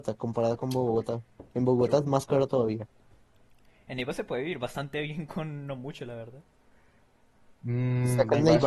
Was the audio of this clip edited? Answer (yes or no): no